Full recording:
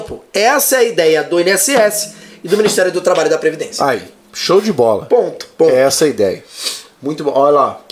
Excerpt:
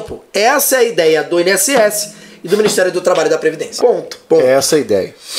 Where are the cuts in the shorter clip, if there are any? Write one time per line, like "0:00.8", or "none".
0:03.8